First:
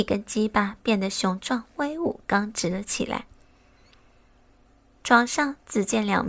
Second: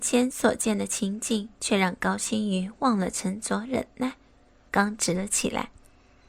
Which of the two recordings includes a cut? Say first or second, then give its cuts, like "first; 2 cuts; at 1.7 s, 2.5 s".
second; 1 cut; at 4.7 s